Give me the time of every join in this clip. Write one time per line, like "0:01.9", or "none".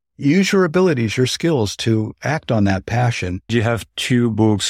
0:03.5